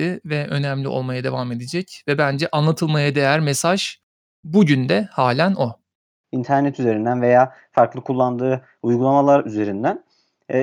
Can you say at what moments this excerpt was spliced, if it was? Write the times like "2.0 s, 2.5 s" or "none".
6.2 s